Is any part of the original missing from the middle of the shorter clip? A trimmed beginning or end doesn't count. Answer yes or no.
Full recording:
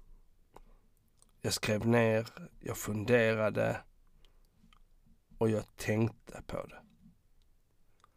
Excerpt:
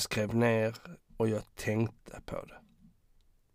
yes